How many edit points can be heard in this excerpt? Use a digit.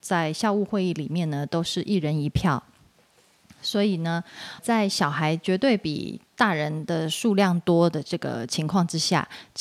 1